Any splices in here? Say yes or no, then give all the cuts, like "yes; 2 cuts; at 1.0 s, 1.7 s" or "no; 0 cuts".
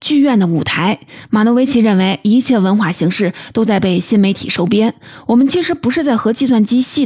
no; 0 cuts